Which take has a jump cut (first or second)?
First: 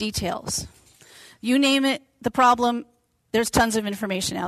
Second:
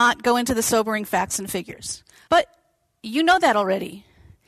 second